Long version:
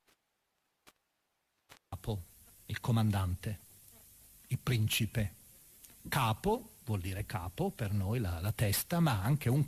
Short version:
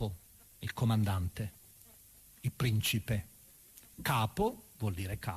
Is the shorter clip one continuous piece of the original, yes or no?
yes